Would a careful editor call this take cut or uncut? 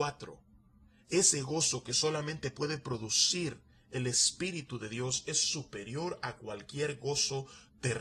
uncut